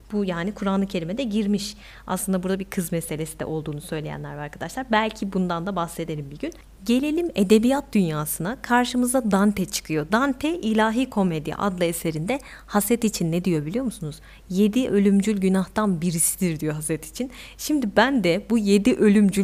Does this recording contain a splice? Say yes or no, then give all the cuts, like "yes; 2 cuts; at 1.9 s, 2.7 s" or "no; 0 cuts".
no; 0 cuts